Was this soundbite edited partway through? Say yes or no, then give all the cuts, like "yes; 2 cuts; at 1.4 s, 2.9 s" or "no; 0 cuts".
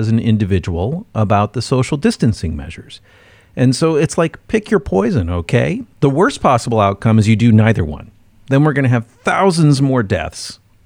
no; 0 cuts